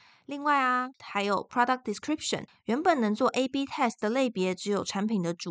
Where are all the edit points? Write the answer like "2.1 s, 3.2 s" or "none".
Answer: 1.0 s